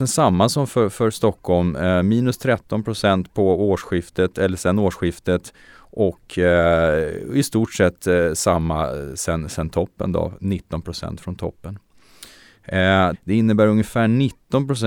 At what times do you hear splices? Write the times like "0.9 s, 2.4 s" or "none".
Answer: 13.1 s